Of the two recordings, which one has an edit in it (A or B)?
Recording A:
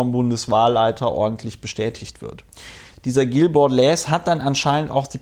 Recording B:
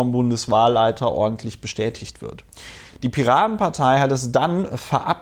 A